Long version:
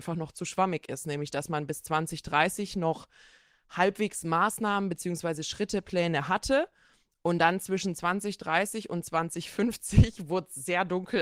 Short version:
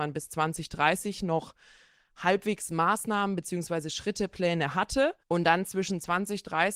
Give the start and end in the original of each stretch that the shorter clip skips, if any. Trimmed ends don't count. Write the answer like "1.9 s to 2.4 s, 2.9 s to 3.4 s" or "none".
6.7 s to 7.1 s

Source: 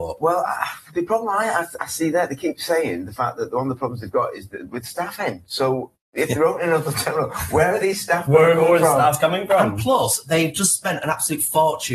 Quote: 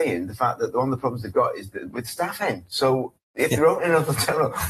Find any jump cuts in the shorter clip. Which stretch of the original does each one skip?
none

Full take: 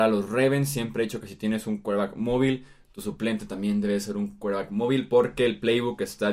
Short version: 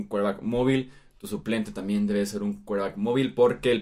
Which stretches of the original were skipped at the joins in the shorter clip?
none

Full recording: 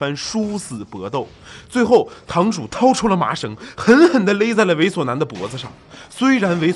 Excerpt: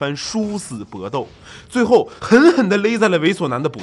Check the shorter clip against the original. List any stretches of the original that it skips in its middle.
2.2 s to 3.8 s

